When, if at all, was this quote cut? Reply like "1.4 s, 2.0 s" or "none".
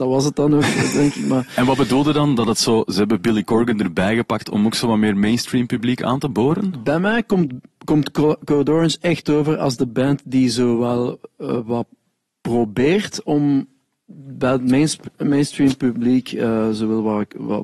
none